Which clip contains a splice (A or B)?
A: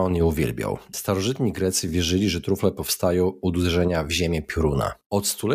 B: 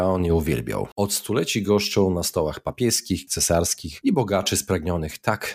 B